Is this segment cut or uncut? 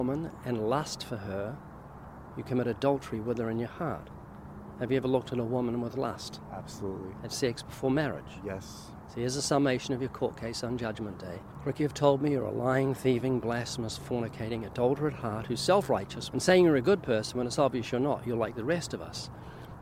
cut